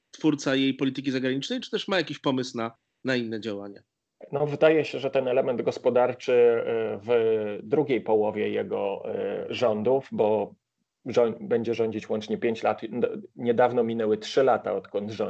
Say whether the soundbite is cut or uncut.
uncut